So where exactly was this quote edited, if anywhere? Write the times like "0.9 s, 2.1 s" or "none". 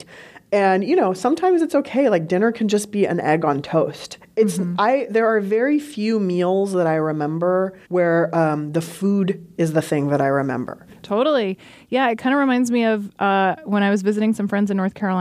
7.8 s, 10.9 s